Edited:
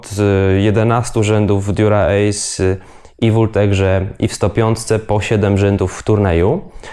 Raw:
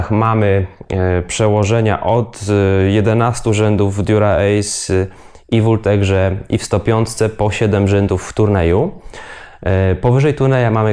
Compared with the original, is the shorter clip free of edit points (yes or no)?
yes